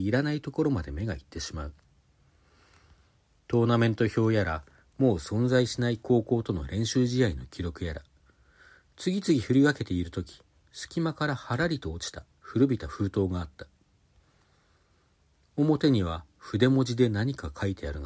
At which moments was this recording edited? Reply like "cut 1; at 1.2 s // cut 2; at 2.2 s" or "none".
none